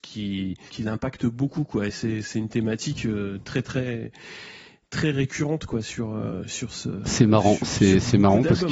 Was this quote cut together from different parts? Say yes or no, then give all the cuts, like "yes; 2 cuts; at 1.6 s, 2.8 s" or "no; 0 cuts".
no; 0 cuts